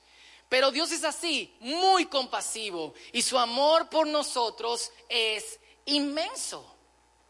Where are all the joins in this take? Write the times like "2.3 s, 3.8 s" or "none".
none

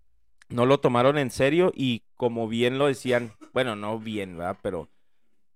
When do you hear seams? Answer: none

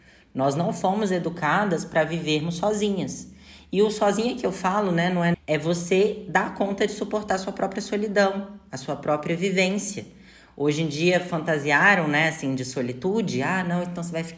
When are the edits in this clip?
5.3 s

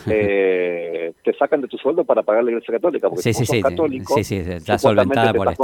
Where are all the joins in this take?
none

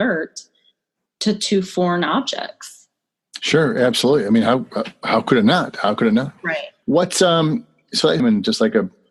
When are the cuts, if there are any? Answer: 6.8 s, 8.2 s

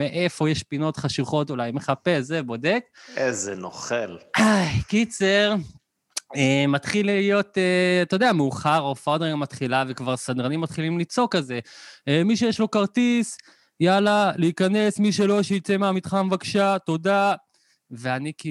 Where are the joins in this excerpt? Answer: none

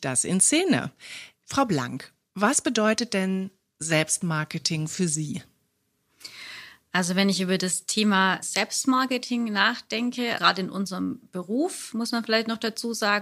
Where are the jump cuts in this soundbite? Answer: 10.3 s

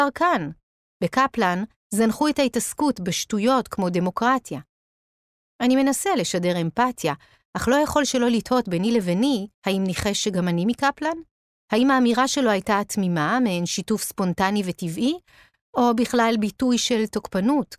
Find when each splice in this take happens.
9.5 s

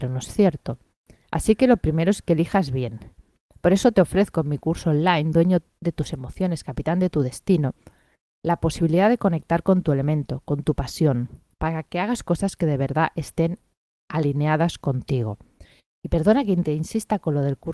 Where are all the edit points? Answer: none

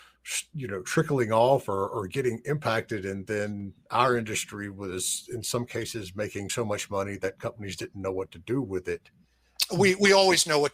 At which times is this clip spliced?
none

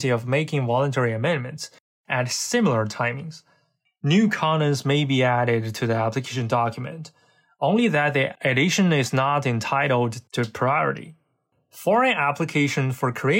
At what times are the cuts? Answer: 3.9 s

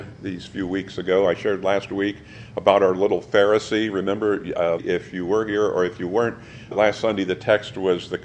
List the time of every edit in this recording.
4.8 s, 6.7 s

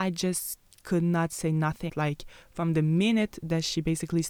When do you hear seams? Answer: 1.9 s

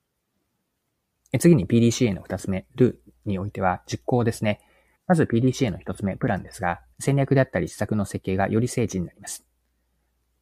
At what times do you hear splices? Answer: 1.2 s, 5.0 s, 6.9 s

